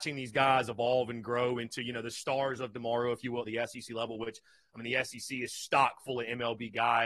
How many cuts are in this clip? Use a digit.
1